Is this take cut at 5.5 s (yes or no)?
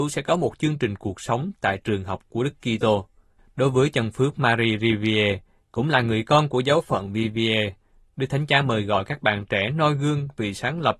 no